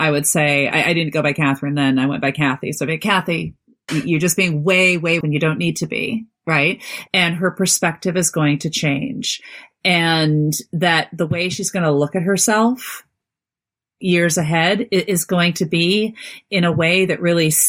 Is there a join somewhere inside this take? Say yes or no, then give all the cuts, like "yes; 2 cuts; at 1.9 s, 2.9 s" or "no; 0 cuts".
yes; 3 cuts; at 3.9 s, 5.2 s, 7.1 s